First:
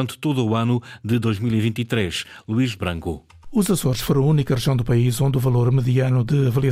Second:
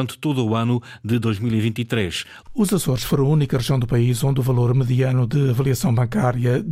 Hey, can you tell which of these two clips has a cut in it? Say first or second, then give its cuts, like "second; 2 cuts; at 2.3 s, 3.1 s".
second; 1 cut; at 2.4 s